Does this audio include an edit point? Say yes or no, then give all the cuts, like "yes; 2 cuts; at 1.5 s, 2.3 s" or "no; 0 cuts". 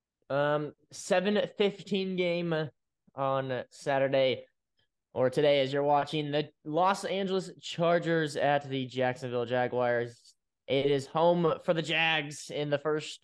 no; 0 cuts